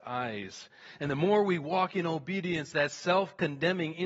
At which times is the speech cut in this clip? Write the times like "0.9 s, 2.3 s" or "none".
2.7 s

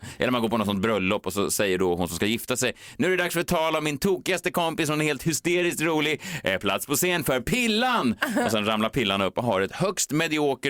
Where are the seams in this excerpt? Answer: none

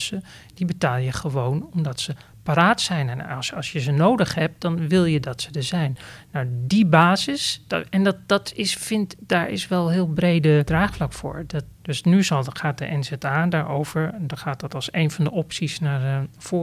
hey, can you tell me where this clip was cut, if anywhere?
11.7 s

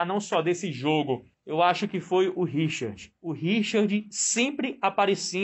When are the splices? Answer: 1.3 s

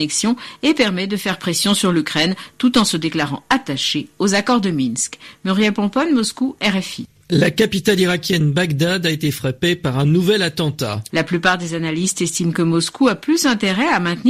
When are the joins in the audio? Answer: 11.1 s

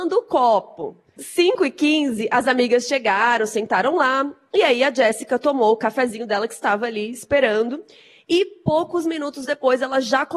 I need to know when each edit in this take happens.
1.2 s

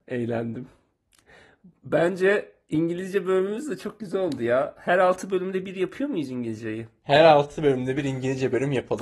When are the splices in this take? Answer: none

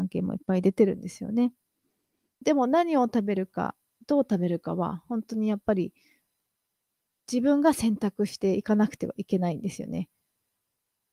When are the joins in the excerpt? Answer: 2.4 s

